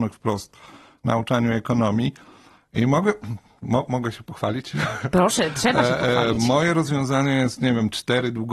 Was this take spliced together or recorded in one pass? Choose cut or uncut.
uncut